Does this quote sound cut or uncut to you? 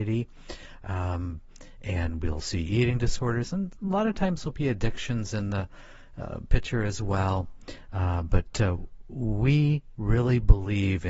uncut